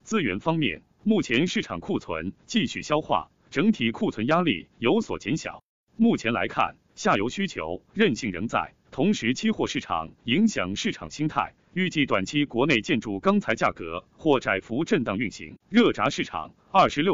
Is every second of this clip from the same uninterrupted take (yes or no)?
no